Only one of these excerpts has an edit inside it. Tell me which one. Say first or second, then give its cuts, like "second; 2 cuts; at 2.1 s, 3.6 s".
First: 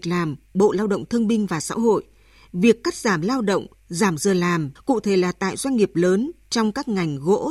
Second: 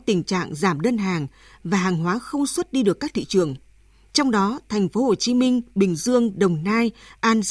first; 1 cut; at 4.8 s